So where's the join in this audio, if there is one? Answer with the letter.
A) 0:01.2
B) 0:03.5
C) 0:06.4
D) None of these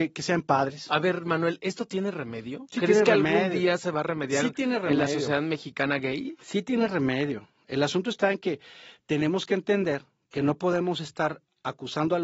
D